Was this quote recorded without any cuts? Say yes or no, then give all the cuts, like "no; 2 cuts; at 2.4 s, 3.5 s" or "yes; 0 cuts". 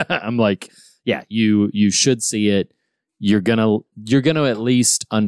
yes; 0 cuts